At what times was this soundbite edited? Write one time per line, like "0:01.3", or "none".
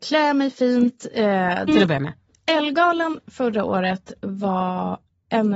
0:01.7